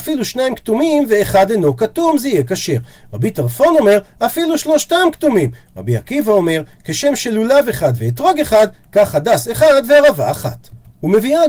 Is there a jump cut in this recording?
no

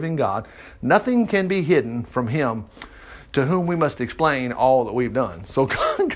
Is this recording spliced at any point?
no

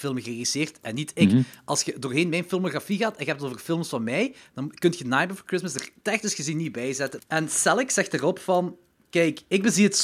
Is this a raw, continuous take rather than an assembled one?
no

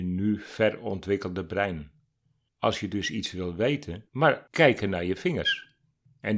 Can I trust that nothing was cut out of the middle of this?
no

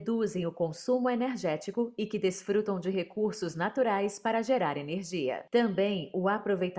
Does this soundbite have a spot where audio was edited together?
no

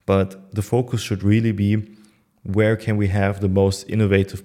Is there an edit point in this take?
no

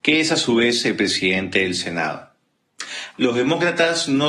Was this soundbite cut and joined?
yes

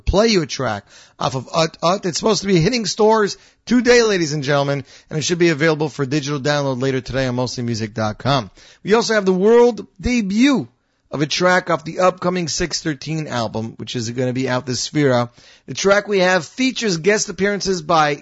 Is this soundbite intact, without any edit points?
yes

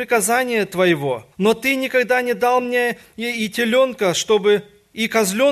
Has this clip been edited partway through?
yes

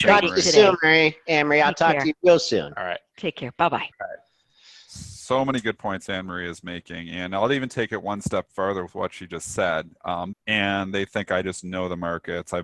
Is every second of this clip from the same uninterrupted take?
no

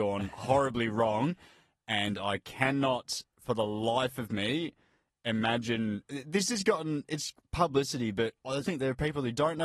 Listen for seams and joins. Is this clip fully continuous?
no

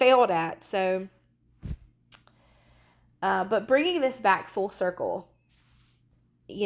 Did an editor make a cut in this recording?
no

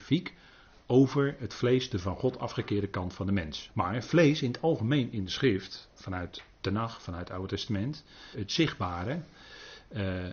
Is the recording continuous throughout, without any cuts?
no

